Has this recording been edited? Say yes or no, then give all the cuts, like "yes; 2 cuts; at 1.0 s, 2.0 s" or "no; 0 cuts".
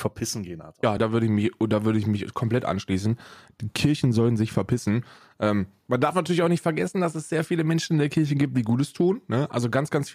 yes; 1 cut; at 1.0 s